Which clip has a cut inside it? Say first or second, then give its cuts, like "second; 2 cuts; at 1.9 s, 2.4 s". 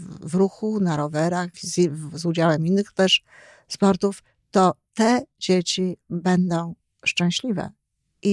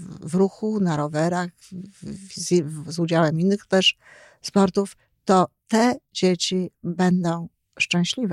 first; 1 cut; at 1.5 s